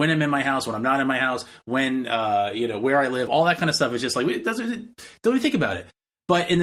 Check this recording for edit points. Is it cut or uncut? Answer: uncut